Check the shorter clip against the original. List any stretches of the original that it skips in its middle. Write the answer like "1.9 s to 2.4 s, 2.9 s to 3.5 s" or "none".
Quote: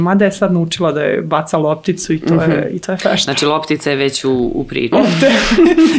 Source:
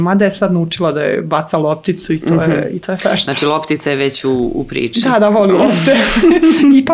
4.9 s to 5.6 s